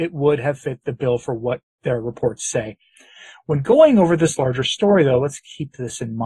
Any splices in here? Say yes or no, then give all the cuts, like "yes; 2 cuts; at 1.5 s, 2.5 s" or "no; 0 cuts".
no; 0 cuts